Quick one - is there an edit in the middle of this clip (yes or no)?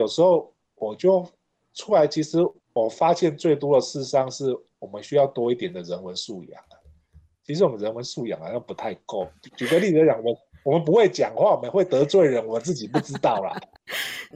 no